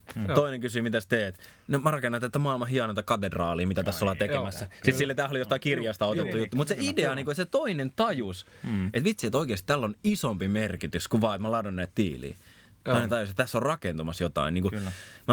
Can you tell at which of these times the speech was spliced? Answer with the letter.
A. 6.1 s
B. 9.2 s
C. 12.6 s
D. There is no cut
D